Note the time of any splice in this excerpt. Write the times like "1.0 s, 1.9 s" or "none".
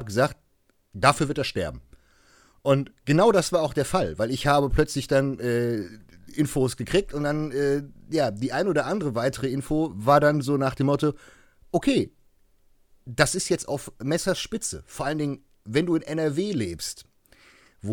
none